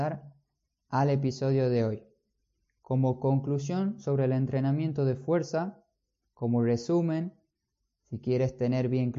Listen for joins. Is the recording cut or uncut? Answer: uncut